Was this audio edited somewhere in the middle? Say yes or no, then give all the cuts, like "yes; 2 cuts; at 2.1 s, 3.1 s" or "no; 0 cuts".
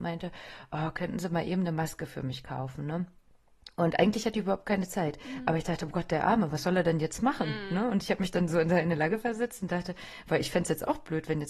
no; 0 cuts